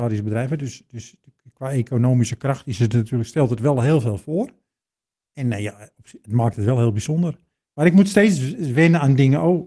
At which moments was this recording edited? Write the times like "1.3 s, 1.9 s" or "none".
6.2 s